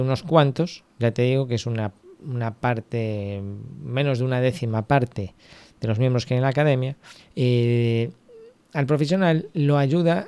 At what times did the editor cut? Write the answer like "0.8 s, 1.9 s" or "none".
7.2 s